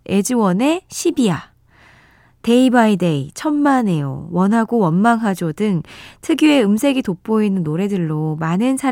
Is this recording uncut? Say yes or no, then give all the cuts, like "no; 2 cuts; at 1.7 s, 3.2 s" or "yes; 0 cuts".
yes; 0 cuts